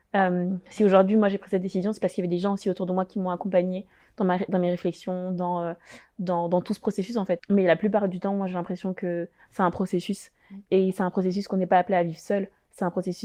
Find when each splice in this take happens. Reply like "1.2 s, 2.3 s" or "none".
7.4 s